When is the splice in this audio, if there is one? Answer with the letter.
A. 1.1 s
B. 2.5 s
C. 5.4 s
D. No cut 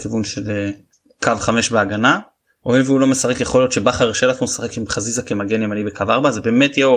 D